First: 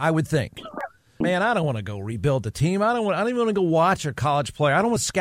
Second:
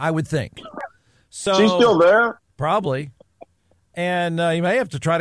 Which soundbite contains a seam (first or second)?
first